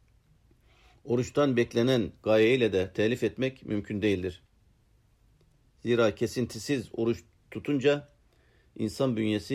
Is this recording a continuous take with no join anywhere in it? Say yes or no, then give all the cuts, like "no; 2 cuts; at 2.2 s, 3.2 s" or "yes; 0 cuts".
yes; 0 cuts